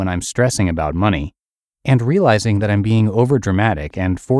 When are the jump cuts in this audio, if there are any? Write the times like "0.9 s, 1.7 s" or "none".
none